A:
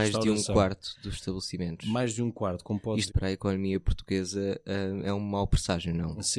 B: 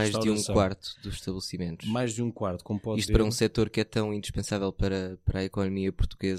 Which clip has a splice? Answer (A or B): A